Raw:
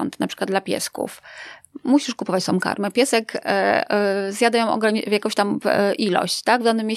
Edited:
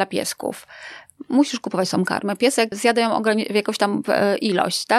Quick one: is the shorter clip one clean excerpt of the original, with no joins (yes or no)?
no